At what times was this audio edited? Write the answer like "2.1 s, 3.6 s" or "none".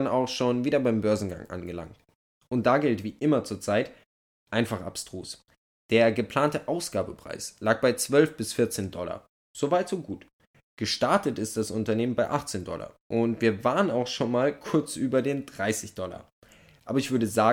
none